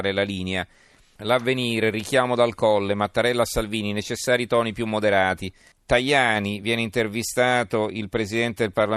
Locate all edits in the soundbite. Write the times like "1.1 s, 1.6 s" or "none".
1.2 s, 5.7 s